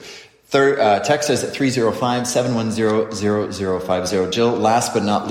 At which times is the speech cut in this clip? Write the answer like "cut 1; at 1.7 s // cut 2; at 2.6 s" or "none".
none